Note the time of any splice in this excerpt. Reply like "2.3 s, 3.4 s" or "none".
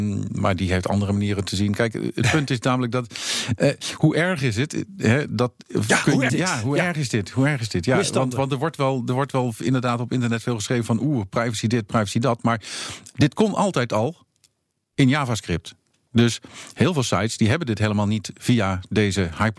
6.3 s